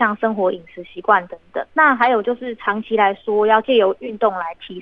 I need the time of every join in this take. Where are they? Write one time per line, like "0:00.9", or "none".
0:01.7